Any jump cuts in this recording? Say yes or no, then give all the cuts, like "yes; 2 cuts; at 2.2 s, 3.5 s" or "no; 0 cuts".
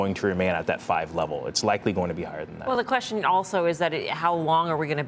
no; 0 cuts